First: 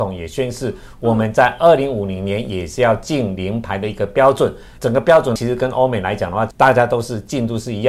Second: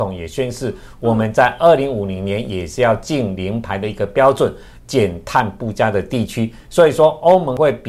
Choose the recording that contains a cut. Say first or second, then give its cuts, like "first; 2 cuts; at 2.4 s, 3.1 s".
second; 1 cut; at 4.8 s